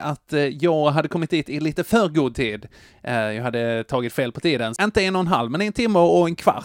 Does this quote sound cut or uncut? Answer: cut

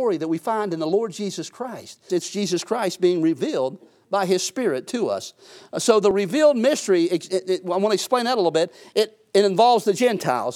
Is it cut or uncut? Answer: cut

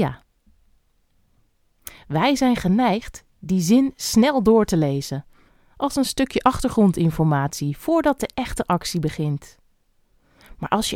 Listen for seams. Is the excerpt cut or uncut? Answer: uncut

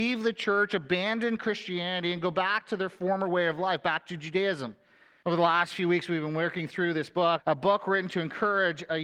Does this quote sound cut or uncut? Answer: cut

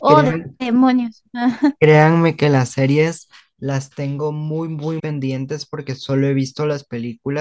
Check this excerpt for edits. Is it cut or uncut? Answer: cut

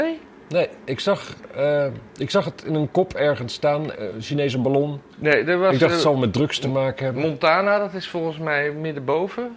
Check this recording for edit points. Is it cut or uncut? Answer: cut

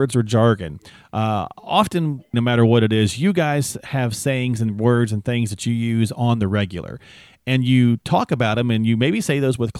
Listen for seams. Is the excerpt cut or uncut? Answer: cut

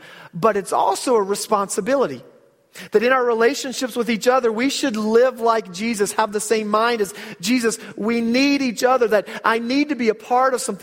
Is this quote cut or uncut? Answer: uncut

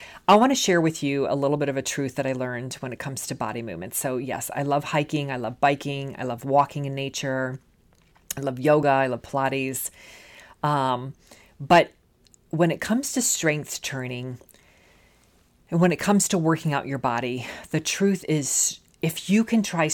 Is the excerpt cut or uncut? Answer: uncut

